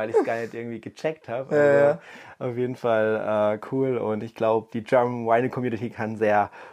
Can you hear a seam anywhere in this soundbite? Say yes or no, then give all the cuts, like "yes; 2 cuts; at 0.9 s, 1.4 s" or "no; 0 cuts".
yes; 1 cut; at 4.7 s